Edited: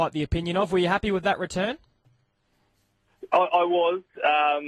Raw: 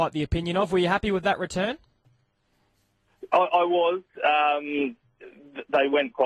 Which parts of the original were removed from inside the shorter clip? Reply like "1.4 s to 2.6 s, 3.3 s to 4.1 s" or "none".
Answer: none

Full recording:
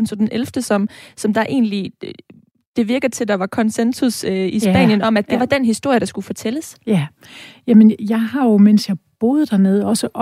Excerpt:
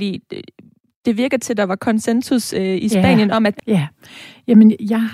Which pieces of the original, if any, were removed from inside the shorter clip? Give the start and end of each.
5.3 s to 6.8 s

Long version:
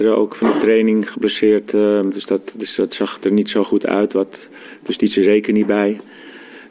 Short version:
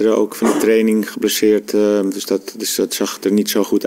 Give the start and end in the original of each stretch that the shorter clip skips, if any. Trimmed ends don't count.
none

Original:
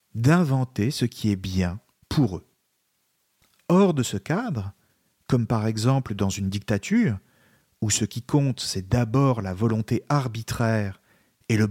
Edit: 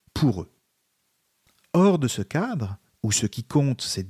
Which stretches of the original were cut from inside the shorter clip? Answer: 4.8 s to 7.7 s

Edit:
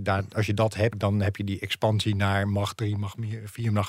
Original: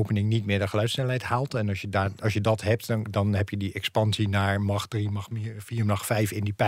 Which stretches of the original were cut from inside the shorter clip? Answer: 2.8 s to 3.1 s

